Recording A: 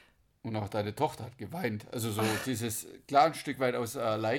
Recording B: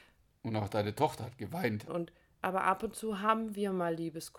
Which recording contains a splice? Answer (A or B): B